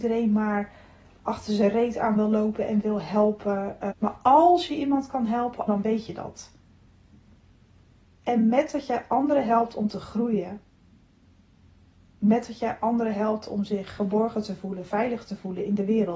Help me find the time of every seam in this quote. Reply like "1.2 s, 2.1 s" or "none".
3.9 s, 5.7 s